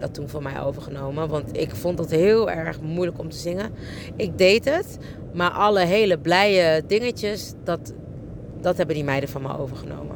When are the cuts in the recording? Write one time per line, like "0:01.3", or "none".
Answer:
0:08.5